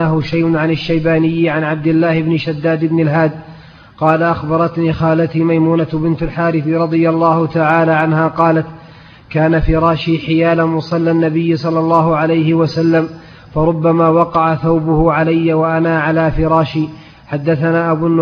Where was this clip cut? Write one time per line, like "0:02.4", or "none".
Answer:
none